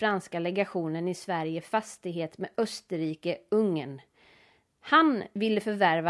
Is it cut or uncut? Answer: cut